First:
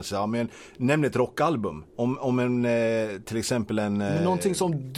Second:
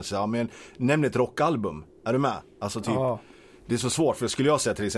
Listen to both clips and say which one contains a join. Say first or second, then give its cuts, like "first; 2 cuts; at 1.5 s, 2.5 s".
first; 1 cut; at 1.9 s